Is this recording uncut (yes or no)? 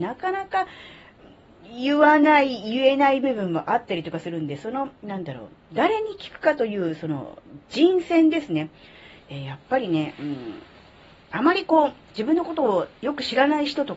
no